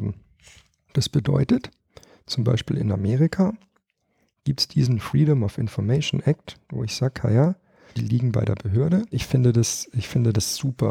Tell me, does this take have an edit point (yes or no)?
yes